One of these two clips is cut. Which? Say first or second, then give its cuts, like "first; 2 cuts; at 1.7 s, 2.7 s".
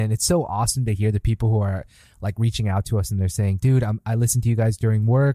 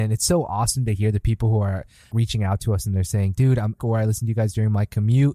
second; 2 cuts; at 2.1 s, 3.8 s